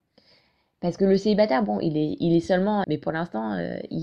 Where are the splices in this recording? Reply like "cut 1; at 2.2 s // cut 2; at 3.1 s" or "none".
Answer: cut 1; at 2.8 s